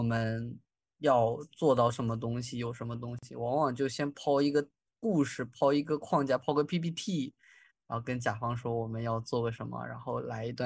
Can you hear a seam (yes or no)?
no